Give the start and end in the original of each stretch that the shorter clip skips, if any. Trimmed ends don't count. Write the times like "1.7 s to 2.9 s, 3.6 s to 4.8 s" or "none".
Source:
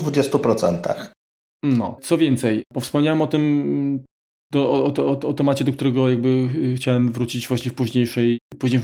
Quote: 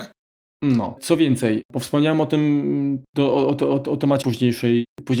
4.1 s to 4.4 s, 5.6 s to 7.8 s